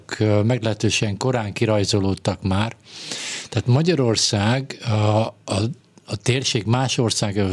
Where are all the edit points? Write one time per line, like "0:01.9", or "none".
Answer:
none